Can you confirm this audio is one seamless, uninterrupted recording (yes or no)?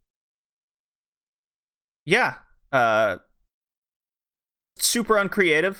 no